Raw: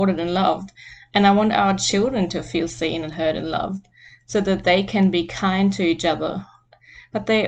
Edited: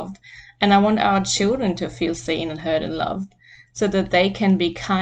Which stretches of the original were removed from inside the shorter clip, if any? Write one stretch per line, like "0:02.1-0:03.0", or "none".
none